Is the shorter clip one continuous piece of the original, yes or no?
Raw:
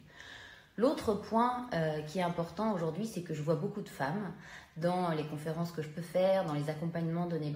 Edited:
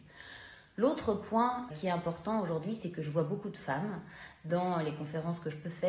no